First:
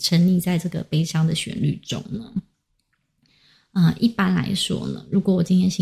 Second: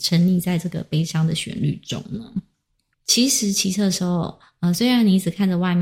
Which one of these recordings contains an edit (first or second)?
second